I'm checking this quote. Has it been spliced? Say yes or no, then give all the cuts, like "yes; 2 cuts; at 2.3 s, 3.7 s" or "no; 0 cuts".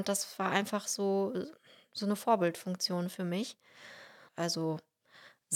yes; 1 cut; at 4.3 s